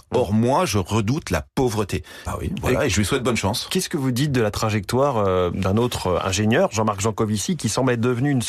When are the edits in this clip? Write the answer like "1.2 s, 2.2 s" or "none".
2.3 s